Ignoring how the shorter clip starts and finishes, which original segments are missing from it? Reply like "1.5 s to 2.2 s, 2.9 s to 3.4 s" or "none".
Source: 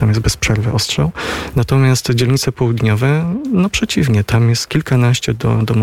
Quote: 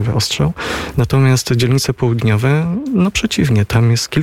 none